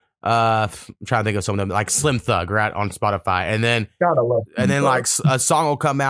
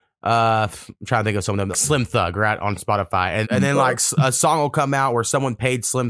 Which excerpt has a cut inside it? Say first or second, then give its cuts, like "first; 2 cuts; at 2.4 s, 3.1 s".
second; 2 cuts; at 1.7 s, 3.4 s